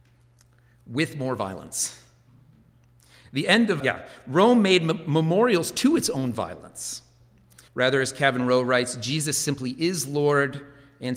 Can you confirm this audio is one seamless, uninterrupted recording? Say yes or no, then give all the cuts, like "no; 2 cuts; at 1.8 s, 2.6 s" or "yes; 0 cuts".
no; 2 cuts; at 3.8 s, 7.7 s